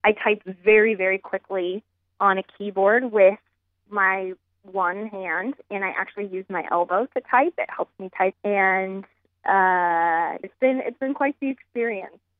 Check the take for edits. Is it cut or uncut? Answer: cut